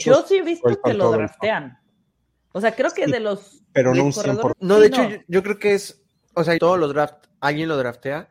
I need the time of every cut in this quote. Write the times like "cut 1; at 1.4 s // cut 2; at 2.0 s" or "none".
cut 1; at 4.5 s // cut 2; at 6.6 s